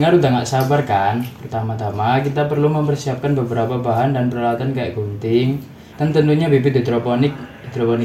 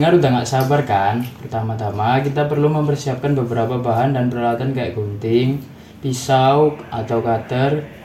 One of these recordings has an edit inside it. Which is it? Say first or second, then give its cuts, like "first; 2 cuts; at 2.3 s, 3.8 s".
first; 1 cut; at 5.9 s